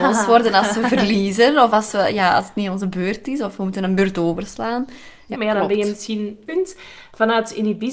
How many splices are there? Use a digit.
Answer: 2